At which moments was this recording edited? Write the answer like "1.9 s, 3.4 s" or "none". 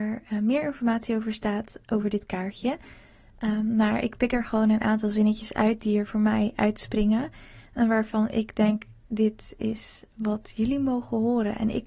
none

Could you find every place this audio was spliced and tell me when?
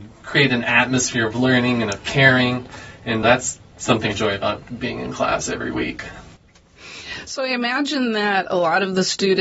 4.1 s

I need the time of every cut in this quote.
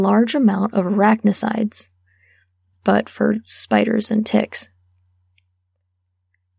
2.7 s

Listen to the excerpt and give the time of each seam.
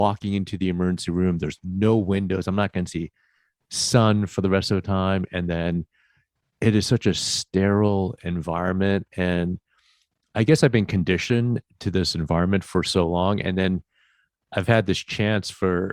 none

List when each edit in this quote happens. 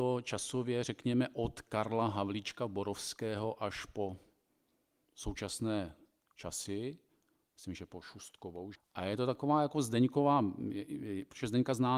8.7 s

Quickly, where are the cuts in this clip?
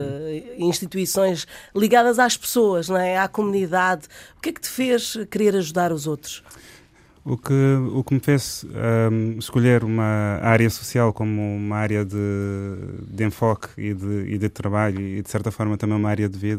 none

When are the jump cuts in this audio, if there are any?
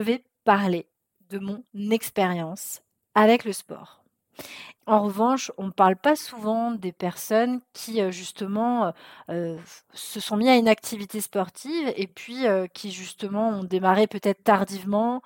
4.8 s

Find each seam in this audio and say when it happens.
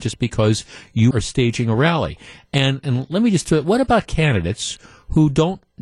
1.1 s

